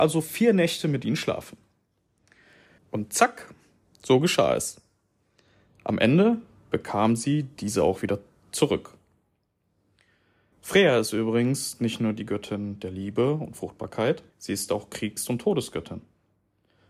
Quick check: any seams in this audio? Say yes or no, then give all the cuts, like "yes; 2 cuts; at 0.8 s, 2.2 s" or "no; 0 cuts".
yes; 3 cuts; at 2.8 s, 10.5 s, 14.3 s